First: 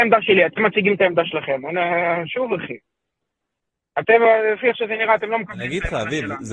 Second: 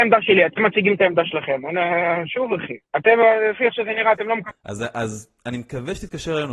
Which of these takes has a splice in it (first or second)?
second